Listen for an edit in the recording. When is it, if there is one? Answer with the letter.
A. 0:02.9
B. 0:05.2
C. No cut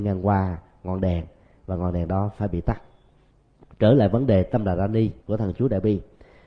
B